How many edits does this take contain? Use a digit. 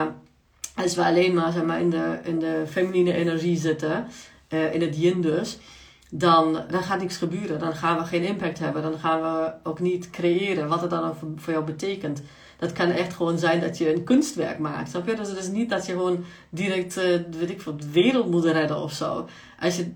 1